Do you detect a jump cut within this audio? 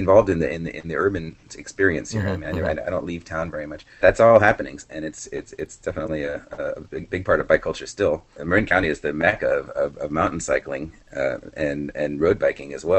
yes; 2 cuts; at 4.0 s, 8.4 s

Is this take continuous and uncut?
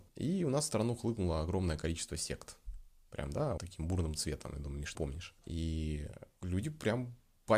no; 2 cuts; at 3.6 s, 5.0 s

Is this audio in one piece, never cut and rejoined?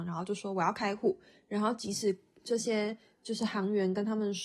yes; 0 cuts

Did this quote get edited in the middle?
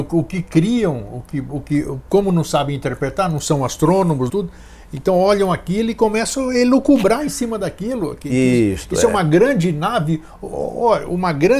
yes; 1 cut; at 4.3 s

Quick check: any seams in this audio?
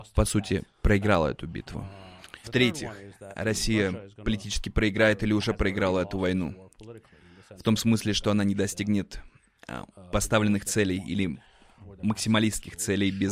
yes; 1 cut; at 2.4 s

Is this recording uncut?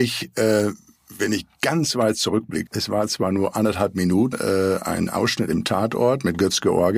no; 2 cuts; at 2.7 s, 4.3 s

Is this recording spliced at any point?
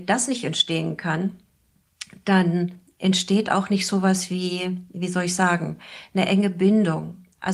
no; 0 cuts

